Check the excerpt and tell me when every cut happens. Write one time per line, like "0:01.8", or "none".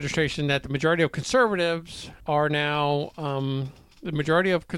0:02.2